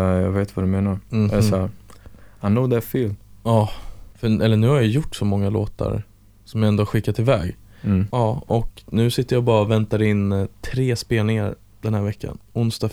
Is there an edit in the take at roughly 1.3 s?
no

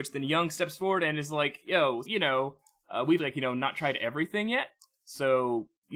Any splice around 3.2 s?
yes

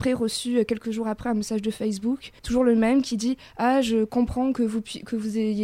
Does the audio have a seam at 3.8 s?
no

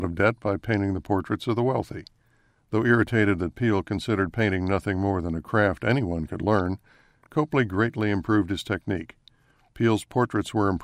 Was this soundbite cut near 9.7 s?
yes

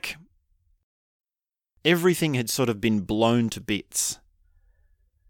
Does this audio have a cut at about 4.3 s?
no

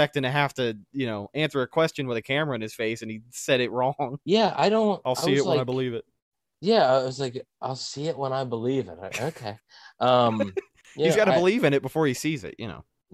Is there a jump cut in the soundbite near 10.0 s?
no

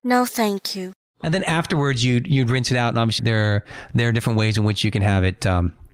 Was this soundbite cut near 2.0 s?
no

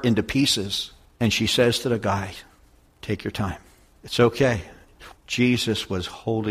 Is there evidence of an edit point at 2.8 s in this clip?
yes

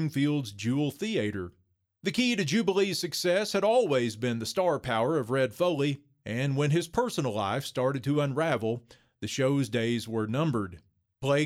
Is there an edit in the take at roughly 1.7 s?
no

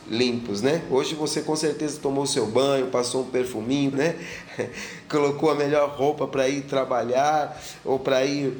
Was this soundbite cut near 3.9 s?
yes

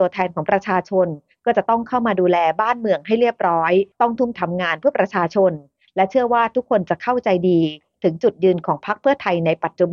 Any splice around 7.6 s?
no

